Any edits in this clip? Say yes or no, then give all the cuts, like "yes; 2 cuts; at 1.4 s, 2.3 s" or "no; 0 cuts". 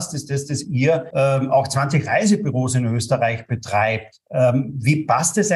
no; 0 cuts